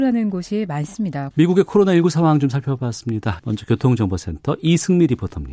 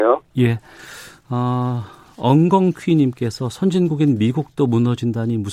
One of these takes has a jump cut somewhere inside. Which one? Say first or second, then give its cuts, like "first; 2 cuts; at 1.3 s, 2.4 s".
first; 2 cuts; at 1.3 s, 3.4 s